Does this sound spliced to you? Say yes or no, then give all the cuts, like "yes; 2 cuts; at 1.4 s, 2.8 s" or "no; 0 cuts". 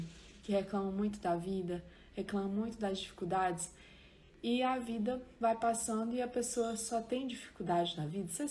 no; 0 cuts